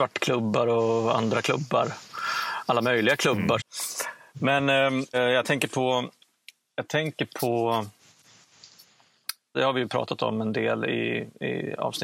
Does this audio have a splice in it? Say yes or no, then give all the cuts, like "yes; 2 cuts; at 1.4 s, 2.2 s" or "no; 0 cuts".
yes; 3 cuts; at 3.6 s, 5.1 s, 9.5 s